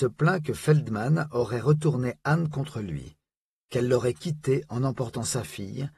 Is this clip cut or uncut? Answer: uncut